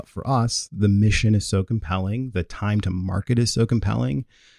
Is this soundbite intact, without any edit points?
no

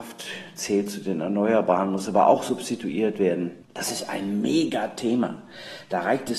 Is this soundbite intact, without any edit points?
no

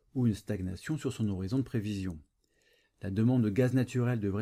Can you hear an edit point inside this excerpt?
yes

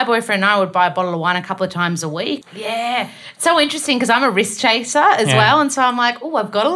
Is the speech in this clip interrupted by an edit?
yes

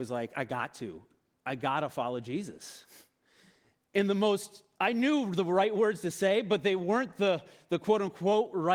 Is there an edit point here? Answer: no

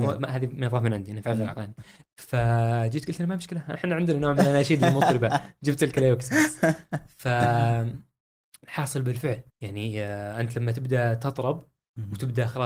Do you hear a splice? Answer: yes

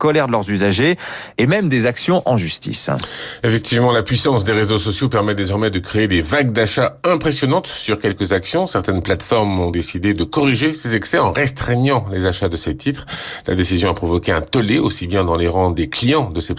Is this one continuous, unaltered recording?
no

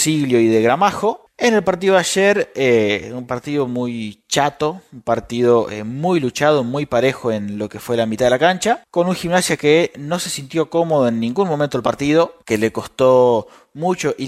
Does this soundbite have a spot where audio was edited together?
yes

